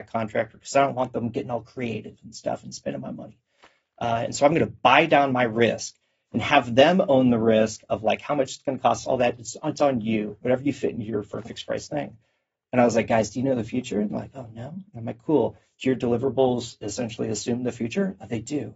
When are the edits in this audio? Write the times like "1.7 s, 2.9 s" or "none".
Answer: none